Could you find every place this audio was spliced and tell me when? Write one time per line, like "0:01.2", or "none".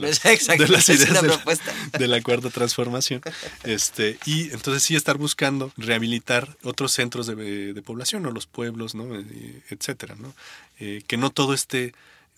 none